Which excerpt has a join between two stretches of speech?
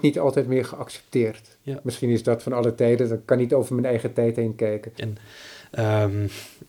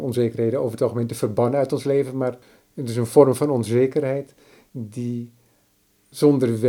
first; 1 cut; at 5.0 s

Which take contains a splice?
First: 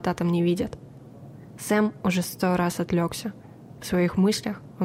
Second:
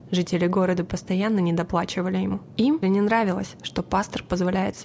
second; 1 cut; at 2.8 s

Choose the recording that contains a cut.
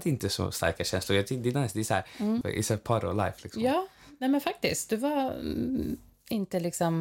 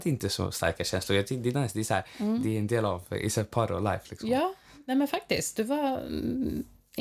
first; 1 cut; at 2.4 s

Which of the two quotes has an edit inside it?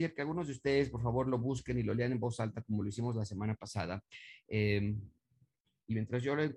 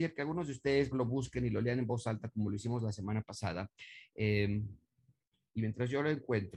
second; 1 cut; at 0.9 s

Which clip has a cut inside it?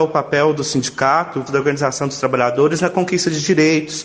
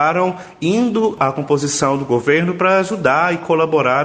first; 1 cut; at 1.5 s

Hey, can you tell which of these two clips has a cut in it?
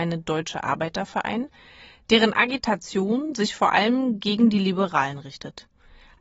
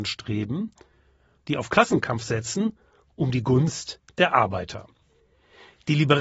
second; 1 cut; at 1.4 s

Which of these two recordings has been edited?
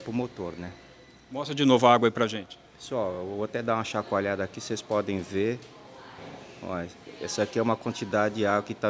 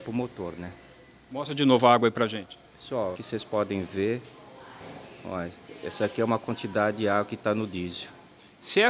second; 1 cut; at 3.1 s

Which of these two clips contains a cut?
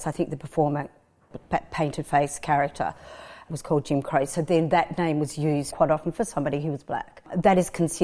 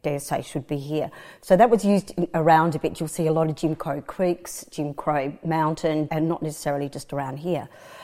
second; 1 cut; at 6.1 s

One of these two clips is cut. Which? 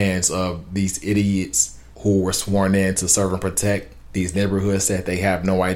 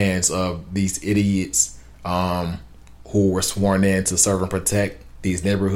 first; 1 cut; at 1.9 s

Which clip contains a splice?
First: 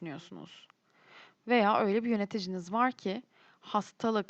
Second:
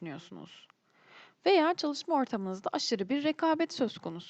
second; 1 cut; at 1.4 s

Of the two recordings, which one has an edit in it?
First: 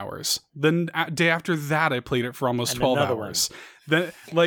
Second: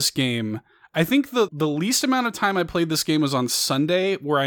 second; 1 cut; at 1.5 s

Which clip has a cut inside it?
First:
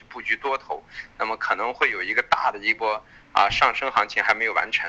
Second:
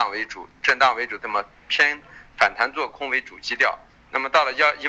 second; 1 cut; at 1.2 s

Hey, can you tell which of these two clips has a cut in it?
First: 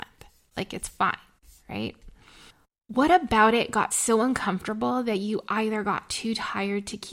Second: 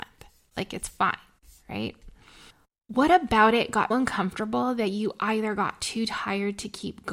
second; 1 cut; at 3.9 s

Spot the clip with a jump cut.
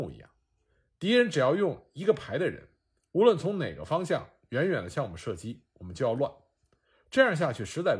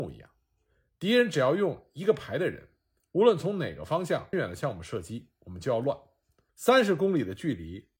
second; 2 cuts; at 4.3 s, 6.5 s

